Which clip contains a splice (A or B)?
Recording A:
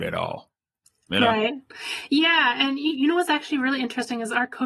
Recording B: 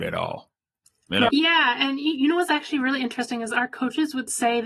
B